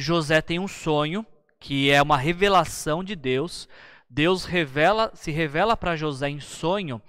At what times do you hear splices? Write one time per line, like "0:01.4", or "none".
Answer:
none